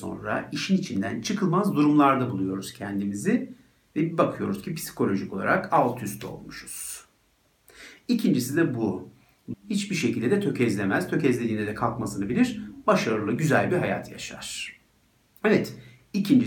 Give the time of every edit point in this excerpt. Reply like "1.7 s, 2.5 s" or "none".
9.5 s